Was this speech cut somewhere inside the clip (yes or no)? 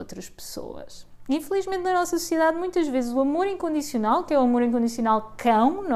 no